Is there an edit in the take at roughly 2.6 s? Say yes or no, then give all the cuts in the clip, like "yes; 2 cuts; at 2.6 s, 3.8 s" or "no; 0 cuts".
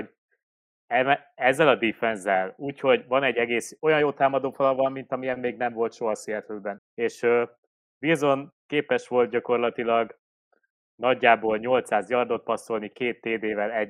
no; 1 cut; at 6.8 s